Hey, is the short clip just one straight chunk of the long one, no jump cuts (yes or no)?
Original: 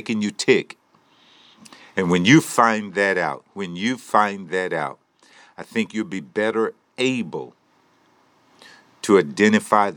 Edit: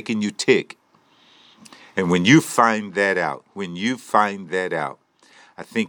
yes